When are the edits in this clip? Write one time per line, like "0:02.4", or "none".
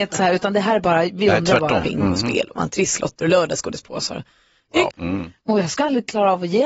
0:01.8
0:04.9

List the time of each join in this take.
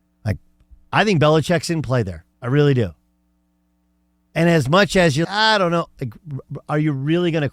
0:02.3
0:05.2

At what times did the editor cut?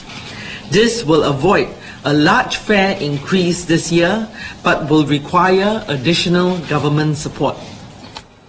none

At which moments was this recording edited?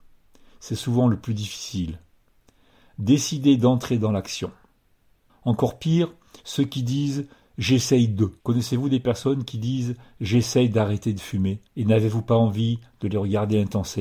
0:05.3
0:08.4
0:11.7

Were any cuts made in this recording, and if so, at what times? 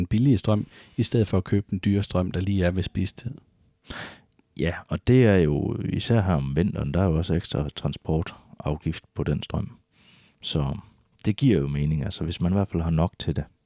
0:09.1

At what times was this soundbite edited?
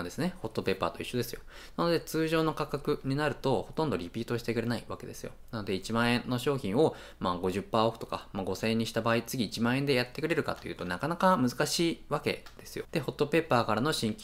0:12.9

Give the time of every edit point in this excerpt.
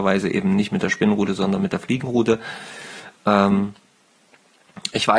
none

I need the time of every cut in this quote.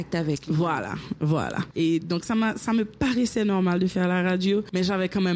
none

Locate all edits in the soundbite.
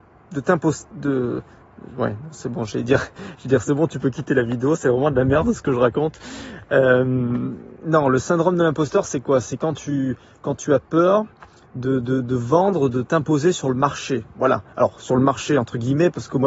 none

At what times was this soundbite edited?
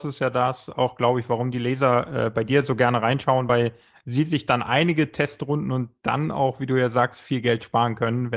none

